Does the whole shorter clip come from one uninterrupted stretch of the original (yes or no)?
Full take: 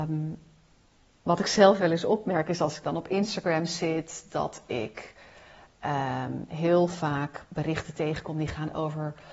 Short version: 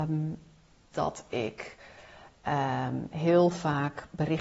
no